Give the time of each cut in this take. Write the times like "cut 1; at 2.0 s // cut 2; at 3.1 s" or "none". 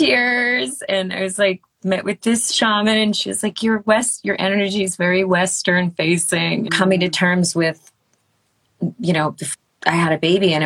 cut 1; at 6.7 s